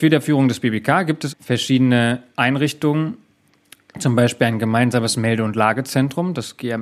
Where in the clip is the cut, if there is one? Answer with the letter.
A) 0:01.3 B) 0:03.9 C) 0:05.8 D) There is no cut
A